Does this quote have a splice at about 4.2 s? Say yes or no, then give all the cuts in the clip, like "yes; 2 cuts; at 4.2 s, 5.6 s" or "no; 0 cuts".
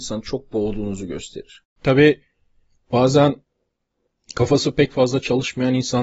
no; 1 cut; at 1.6 s